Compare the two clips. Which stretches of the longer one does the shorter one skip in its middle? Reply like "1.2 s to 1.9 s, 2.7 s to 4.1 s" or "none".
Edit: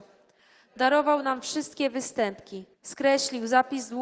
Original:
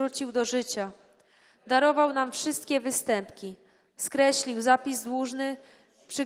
3.6 s to 3.9 s